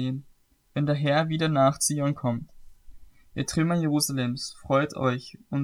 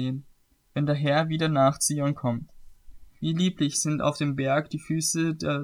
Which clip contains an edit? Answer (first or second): second